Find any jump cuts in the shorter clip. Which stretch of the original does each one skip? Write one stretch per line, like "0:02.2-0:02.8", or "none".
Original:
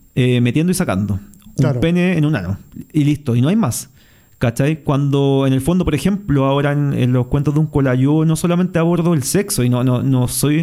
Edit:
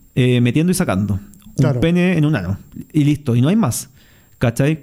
none

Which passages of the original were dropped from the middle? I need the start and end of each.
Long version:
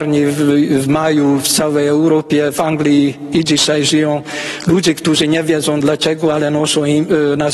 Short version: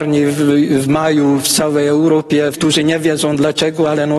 0:02.5-0:05.0

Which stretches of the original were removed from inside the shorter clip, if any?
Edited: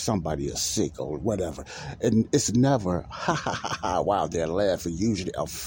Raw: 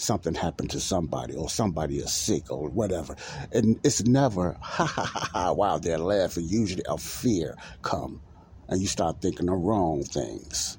none

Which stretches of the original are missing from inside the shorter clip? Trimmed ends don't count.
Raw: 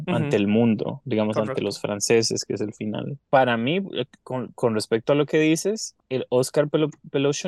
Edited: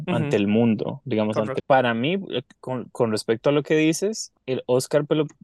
0:01.6-0:03.2

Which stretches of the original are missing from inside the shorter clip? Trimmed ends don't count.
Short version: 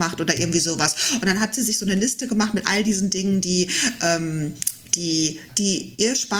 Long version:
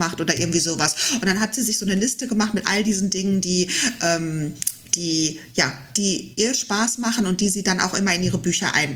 0:05.5-0:05.9

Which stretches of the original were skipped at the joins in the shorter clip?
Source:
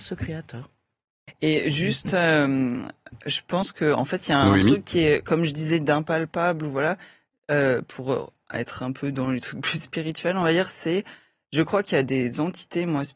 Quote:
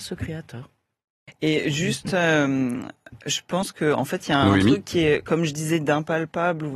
none

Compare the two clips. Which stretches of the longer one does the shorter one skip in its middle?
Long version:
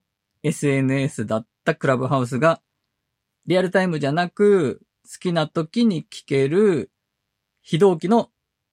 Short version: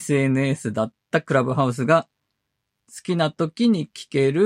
0:03.3-0:05.0

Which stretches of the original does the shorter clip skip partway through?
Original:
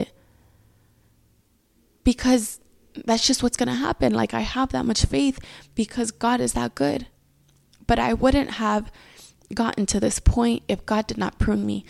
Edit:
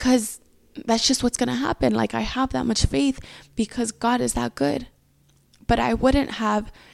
none

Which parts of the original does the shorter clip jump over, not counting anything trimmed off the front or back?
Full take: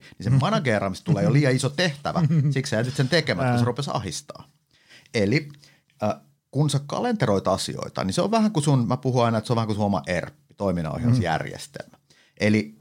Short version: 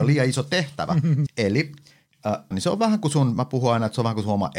0:02.5-0:05.0
0:06.3-0:08.0

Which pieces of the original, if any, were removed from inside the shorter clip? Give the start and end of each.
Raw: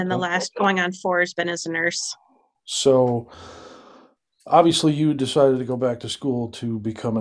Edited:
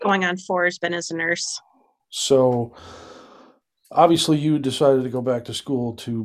none

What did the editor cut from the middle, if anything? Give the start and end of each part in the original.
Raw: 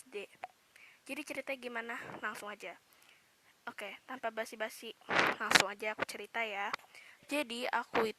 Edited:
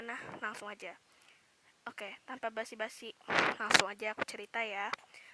none

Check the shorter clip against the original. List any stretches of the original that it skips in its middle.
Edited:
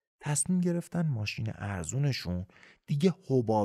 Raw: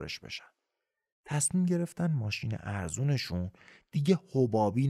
none

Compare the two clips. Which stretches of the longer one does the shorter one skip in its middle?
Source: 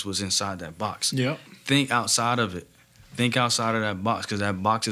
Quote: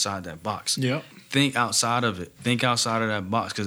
0:02.7-0:03.1

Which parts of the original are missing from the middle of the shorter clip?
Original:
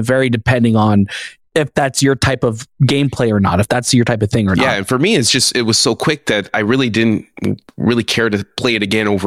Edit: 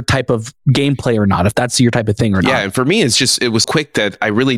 0:05.8-0:06.0

